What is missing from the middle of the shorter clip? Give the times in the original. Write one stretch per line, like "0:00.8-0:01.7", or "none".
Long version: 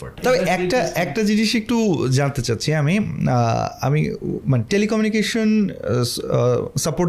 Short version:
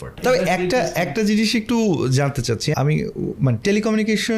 0:02.7-0:03.8